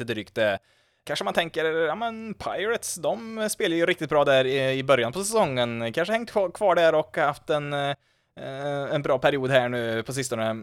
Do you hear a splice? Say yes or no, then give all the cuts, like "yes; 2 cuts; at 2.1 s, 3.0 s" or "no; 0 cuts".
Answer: no; 0 cuts